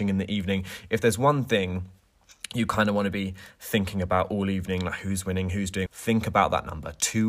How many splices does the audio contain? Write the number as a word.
one